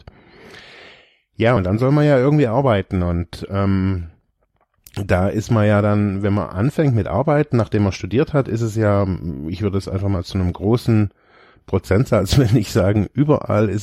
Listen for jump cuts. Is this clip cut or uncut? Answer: uncut